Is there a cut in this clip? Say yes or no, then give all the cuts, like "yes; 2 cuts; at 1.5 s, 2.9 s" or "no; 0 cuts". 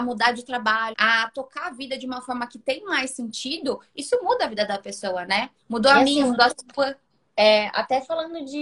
yes; 1 cut; at 0.9 s